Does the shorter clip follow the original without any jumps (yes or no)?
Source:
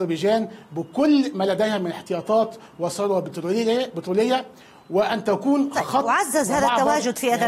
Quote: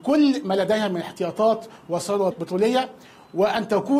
no